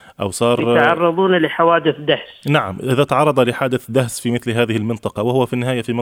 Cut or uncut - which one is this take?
uncut